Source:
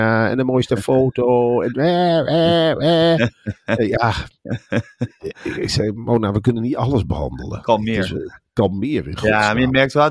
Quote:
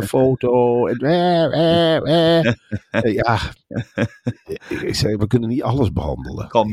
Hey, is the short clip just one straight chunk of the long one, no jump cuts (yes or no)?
no